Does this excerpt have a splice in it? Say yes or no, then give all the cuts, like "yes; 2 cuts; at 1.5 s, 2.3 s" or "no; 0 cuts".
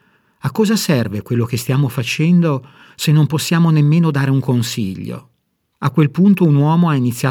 yes; 1 cut; at 5.7 s